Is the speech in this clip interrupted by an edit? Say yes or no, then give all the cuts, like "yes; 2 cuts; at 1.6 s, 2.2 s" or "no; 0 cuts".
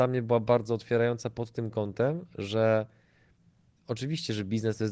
no; 0 cuts